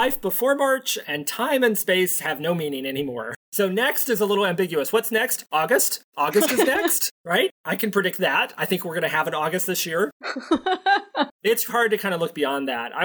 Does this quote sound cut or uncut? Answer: cut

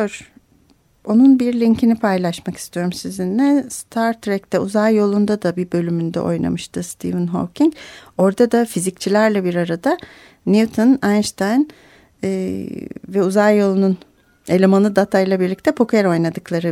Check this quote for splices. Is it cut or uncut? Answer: uncut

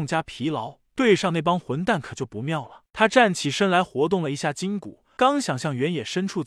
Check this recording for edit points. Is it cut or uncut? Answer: cut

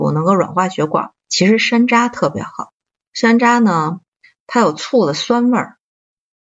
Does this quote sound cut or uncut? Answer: cut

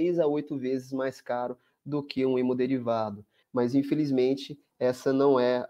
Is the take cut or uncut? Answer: cut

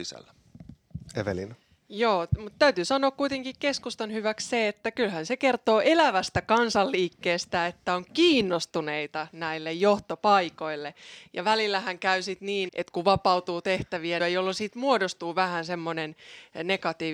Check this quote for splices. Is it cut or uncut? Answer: cut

